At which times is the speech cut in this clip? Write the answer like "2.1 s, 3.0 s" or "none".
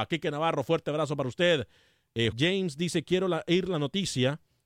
2.3 s

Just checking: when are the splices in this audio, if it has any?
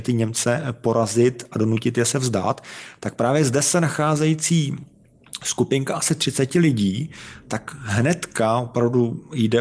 none

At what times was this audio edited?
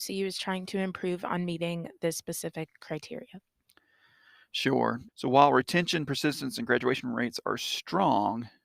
5.1 s

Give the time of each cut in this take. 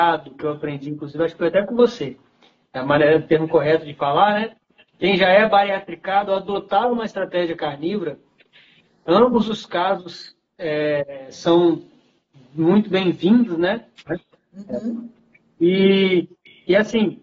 14.1 s

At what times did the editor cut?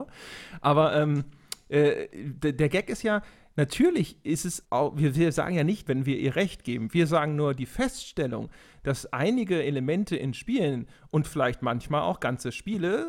4.6 s, 5.9 s

